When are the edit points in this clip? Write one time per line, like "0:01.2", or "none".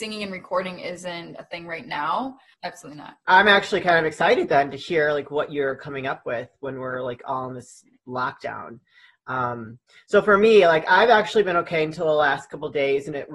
0:02.5